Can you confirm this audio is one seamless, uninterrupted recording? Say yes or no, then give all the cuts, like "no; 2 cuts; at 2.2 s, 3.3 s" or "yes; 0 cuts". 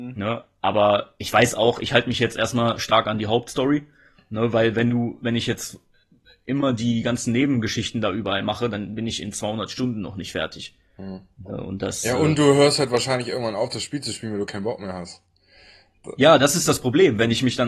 yes; 0 cuts